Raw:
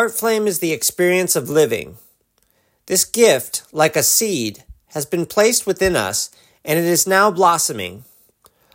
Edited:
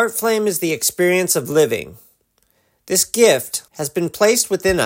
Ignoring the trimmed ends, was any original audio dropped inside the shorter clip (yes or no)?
yes